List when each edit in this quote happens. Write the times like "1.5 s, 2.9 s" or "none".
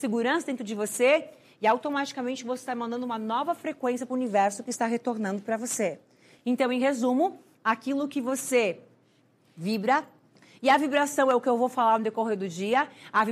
none